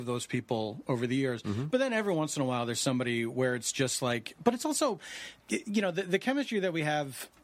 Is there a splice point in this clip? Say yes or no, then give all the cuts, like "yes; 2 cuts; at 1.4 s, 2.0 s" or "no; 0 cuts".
yes; 1 cut; at 5.4 s